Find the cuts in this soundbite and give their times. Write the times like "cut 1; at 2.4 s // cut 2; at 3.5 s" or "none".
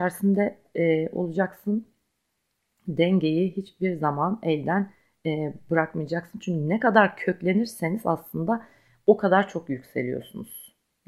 none

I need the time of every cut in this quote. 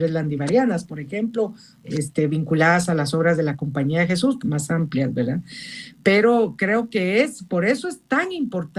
cut 1; at 1.8 s // cut 2; at 4.4 s

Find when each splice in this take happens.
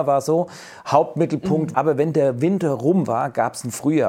cut 1; at 1.7 s

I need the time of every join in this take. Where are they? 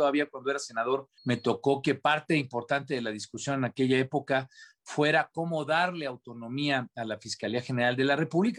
cut 1; at 1.2 s

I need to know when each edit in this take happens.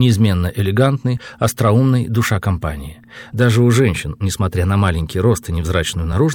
none

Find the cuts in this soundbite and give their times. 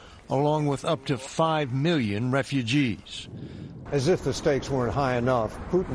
cut 1; at 3.9 s

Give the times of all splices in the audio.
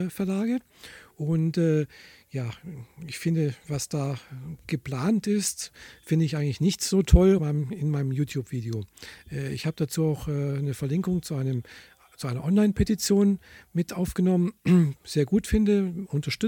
cut 1; at 7.4 s // cut 2; at 14.9 s

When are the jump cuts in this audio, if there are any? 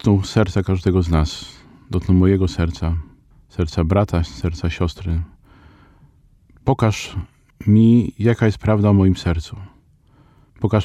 none

